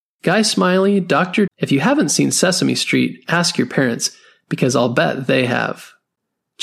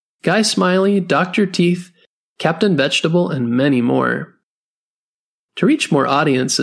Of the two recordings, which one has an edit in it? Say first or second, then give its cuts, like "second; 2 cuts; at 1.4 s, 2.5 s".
first; 1 cut; at 1.5 s